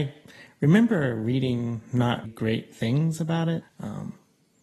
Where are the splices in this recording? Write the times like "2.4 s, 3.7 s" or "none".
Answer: 2.2 s, 3.6 s